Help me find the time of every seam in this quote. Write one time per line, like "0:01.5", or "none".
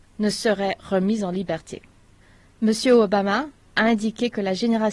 none

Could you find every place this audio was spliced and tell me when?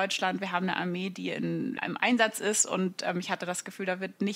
0:01.8

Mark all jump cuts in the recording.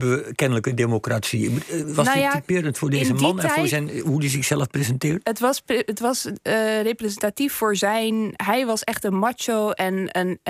none

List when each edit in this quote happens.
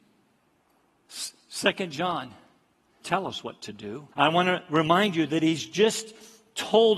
0:03.0
0:04.1

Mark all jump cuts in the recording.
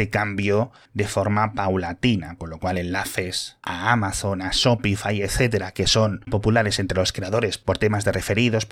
0:06.3

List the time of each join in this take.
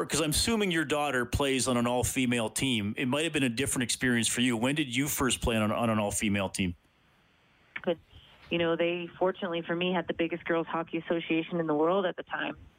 0:07.8

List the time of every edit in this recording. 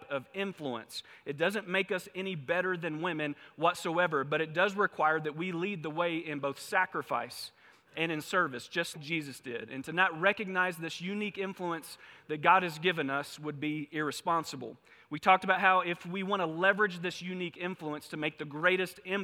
0:08.9

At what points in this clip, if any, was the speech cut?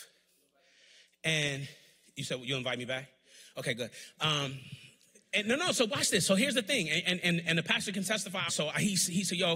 0:08.5

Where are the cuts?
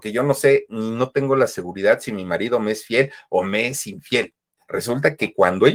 0:04.6

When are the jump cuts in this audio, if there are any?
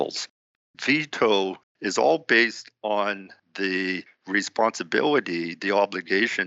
0:01.6

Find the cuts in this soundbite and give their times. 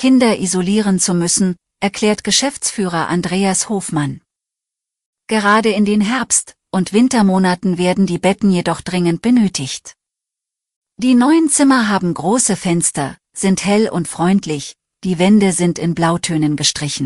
0:01.7

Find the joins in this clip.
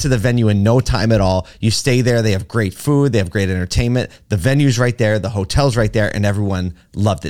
none

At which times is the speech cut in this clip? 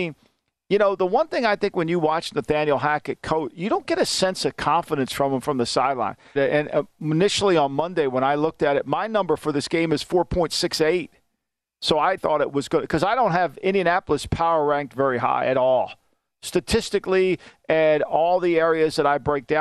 0:06.4
0:12.2

